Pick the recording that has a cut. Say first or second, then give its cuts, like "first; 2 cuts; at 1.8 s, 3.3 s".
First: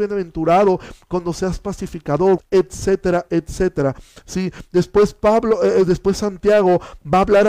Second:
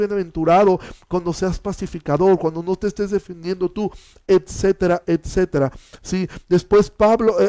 first; 1 cut; at 2.4 s